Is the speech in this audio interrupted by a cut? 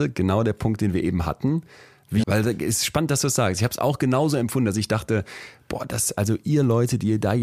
yes; 1 cut; at 2.2 s

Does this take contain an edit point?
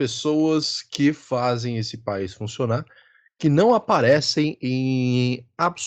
no; 0 cuts

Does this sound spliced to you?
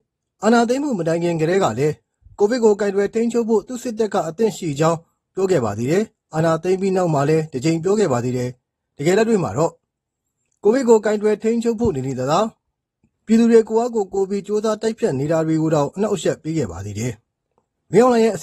no; 0 cuts

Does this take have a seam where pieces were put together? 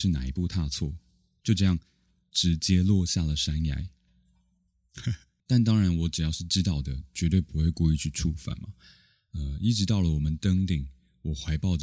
yes; 1 cut; at 5.4 s

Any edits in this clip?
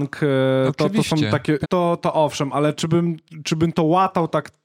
yes; 1 cut; at 1.6 s

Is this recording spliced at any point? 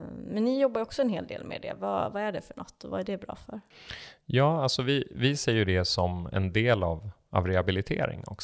no; 0 cuts

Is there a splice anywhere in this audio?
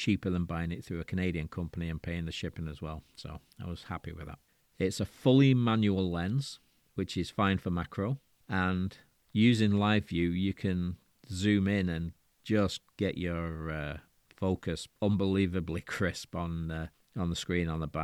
no; 0 cuts

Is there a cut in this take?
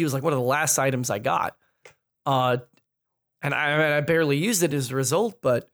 no; 0 cuts

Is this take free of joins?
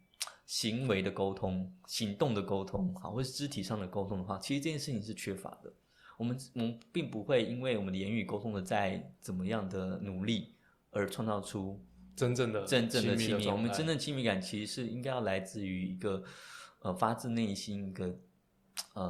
yes; 0 cuts

